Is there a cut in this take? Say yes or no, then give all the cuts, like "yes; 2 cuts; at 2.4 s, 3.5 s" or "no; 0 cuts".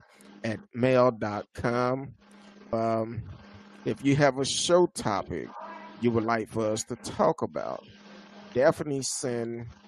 yes; 1 cut; at 2.7 s